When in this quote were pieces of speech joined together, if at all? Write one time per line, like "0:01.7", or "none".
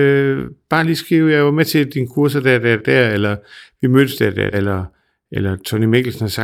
0:02.8
0:04.5